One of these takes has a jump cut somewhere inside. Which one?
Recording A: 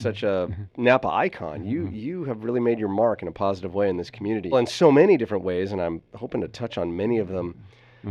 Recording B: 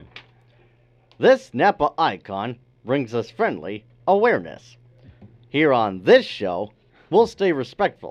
A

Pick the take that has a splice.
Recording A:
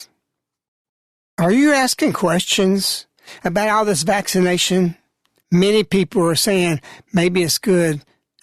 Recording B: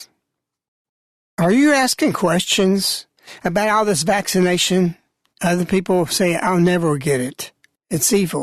B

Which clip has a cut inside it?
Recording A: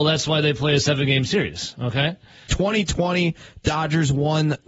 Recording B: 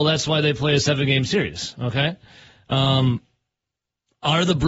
A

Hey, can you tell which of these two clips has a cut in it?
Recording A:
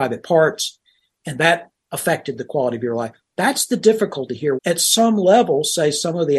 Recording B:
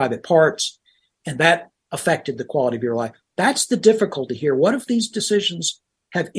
A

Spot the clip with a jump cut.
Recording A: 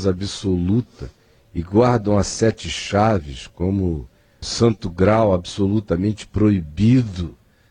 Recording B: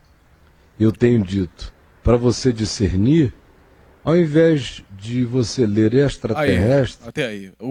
A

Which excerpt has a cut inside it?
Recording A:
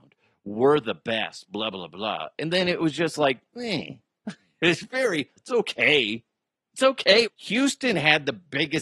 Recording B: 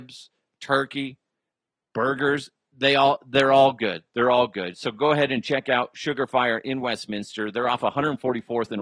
A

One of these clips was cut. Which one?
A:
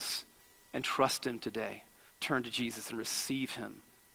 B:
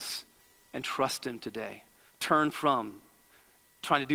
A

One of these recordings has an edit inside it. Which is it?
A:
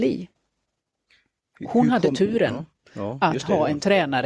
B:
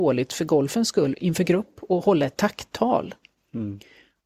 B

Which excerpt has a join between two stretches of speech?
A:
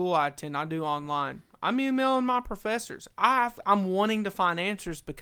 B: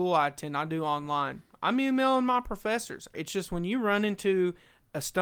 B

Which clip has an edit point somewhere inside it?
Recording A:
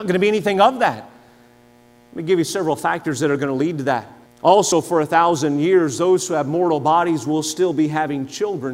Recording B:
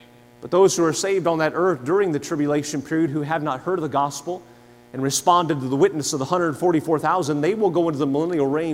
A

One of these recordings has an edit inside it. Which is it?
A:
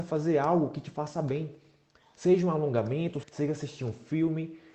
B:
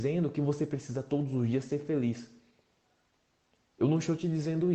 A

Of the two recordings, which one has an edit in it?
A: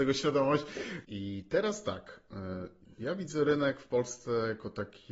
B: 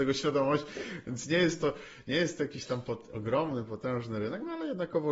A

